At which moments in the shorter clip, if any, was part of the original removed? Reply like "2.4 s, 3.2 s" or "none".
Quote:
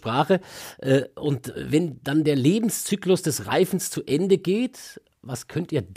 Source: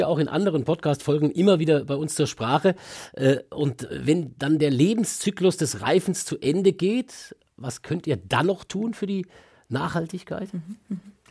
none